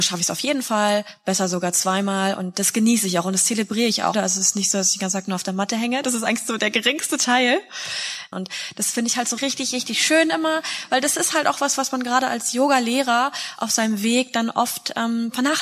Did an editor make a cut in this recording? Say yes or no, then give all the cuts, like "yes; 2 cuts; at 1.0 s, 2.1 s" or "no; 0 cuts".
yes; 3 cuts; at 4.1 s, 8.3 s, 9.4 s